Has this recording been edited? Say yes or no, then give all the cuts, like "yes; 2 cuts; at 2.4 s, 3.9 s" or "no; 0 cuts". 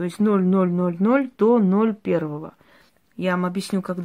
yes; 1 cut; at 3.1 s